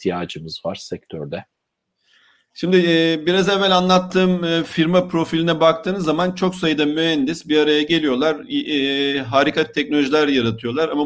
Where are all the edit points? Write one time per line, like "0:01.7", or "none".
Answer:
none

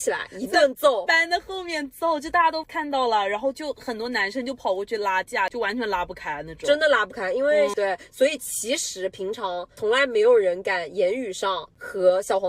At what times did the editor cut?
0:07.7

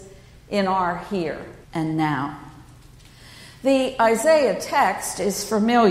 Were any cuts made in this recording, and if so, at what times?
0:01.6

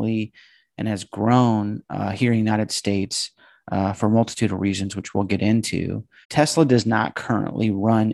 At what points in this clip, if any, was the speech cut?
0:06.2

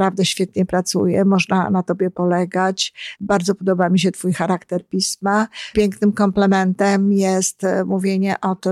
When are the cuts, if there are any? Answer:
0:03.2
0:05.7

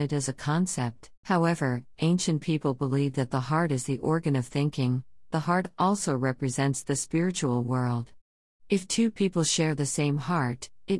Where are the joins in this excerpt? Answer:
0:01.2
0:05.3

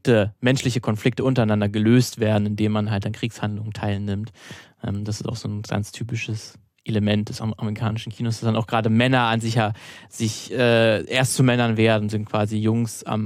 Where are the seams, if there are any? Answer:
none

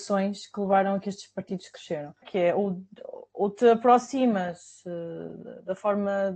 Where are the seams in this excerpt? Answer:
0:02.2

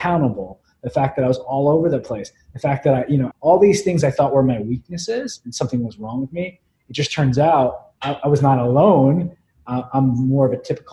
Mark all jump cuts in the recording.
0:03.3
0:08.0

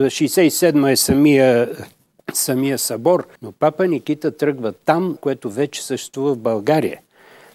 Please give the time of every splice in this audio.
0:03.4
0:05.2

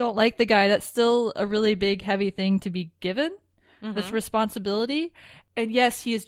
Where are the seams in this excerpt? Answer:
none

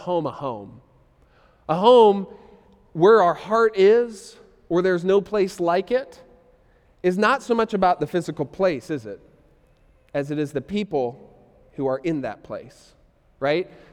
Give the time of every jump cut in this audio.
none

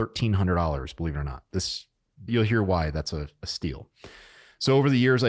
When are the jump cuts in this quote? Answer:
0:02.3

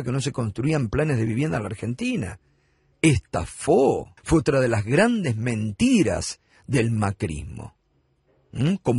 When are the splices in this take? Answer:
0:02.9
0:04.2

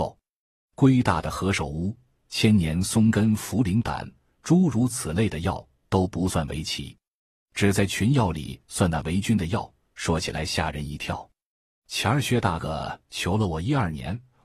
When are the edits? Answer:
0:12.6

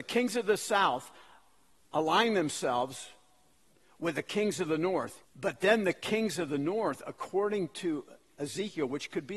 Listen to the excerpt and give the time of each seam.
0:05.2

